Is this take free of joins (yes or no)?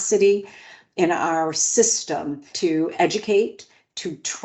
no